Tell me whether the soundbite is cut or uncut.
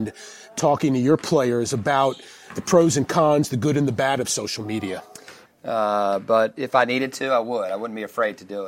cut